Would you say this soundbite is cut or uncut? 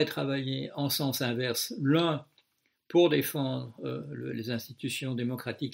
uncut